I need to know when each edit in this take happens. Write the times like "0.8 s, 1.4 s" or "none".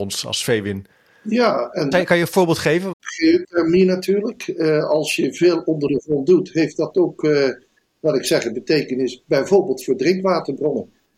1.9 s, 2.9 s